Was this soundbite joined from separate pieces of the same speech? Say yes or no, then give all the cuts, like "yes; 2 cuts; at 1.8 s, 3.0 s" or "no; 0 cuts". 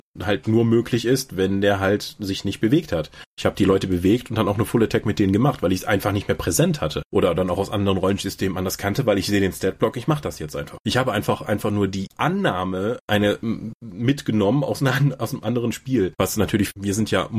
no; 0 cuts